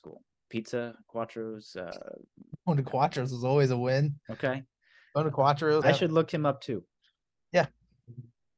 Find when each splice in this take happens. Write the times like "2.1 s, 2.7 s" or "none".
5.8 s